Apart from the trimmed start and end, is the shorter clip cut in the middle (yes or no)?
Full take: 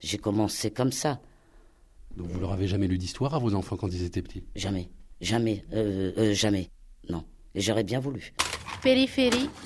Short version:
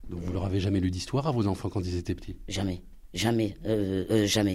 no